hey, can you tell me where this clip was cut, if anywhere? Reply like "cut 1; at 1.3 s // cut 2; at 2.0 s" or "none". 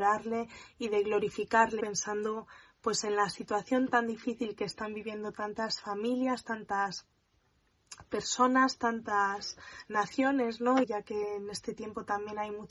cut 1; at 1.8 s // cut 2; at 10.8 s